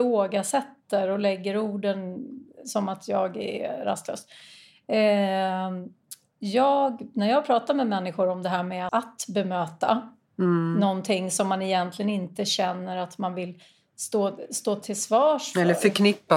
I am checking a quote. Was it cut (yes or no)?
yes